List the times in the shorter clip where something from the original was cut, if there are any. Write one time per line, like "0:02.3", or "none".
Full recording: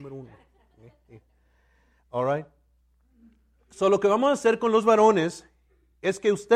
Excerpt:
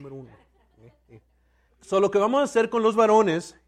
0:01.7